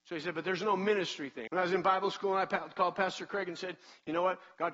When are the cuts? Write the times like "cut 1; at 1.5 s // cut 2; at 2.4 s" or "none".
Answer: cut 1; at 1.5 s